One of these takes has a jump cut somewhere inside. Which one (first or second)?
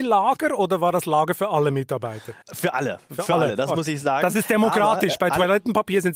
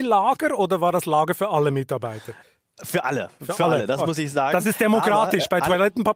first